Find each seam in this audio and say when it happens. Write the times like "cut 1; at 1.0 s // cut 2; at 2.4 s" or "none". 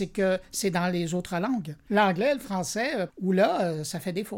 cut 1; at 1.9 s // cut 2; at 3.1 s